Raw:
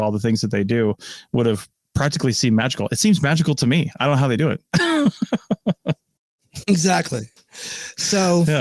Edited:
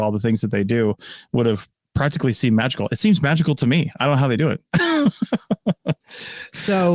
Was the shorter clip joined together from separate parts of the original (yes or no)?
yes